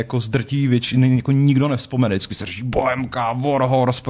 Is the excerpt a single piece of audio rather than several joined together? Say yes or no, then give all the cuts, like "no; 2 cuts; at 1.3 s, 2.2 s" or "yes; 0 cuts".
yes; 0 cuts